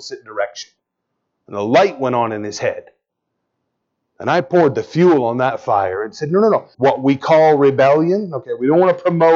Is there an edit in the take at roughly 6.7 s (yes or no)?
yes